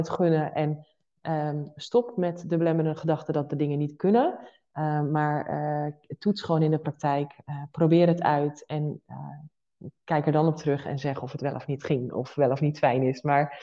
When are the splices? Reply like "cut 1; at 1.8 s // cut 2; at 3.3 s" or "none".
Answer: none